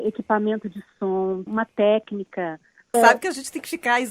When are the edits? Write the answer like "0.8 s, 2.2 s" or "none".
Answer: 1.5 s, 2.9 s